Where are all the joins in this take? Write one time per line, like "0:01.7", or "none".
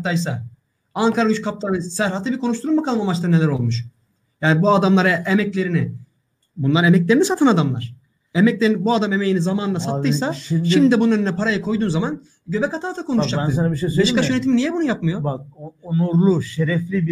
none